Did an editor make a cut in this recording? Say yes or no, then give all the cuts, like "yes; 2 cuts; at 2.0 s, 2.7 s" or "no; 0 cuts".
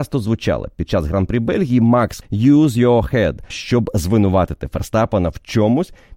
yes; 2 cuts; at 2.2 s, 3.5 s